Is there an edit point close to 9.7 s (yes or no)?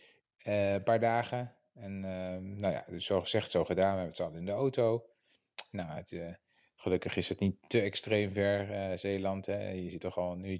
no